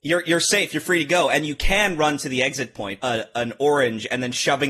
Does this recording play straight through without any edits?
no; 1 cut; at 3.0 s

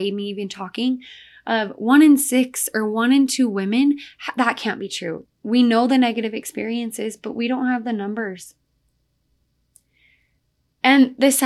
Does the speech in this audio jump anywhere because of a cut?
yes; 1 cut; at 5.3 s

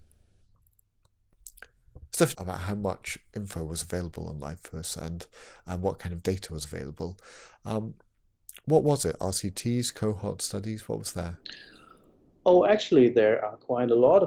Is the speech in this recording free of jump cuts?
no; 1 cut; at 2.3 s

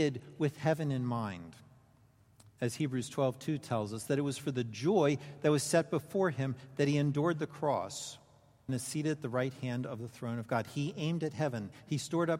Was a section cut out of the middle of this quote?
yes; 1 cut; at 8.7 s

